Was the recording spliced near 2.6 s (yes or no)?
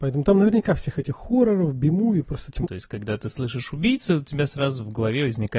yes